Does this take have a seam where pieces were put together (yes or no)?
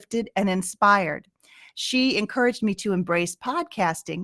no